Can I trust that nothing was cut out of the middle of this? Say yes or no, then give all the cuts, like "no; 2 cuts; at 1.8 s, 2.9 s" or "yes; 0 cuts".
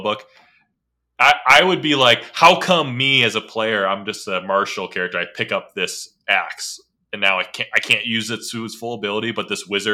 yes; 0 cuts